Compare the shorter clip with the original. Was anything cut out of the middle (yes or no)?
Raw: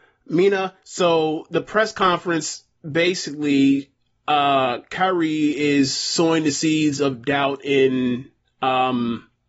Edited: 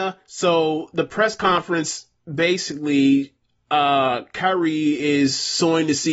no